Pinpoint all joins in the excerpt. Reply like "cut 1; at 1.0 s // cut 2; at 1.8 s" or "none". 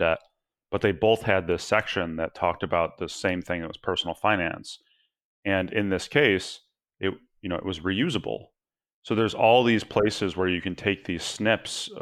none